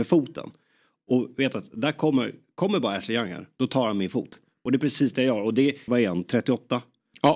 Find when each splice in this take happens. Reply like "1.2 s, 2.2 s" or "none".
5.9 s